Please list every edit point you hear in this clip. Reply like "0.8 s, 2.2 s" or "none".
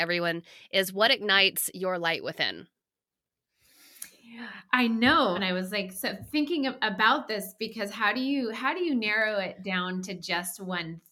5.3 s, 10.0 s